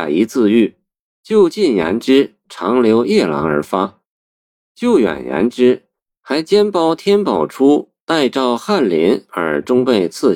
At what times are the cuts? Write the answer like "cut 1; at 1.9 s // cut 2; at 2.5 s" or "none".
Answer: cut 1; at 2.4 s